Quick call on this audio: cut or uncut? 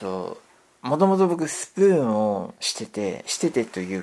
uncut